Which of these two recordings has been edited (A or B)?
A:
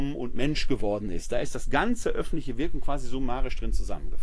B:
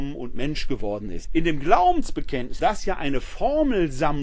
B